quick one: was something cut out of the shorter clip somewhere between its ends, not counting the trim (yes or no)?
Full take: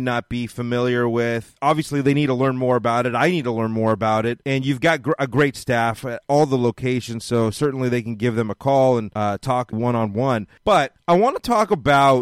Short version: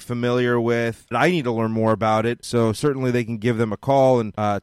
yes